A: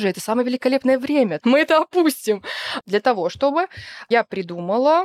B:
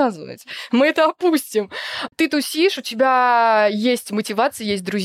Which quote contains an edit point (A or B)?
A